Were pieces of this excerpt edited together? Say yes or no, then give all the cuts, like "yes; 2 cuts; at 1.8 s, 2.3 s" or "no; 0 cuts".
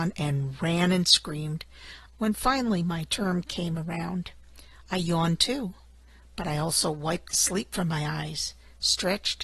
yes; 1 cut; at 2.1 s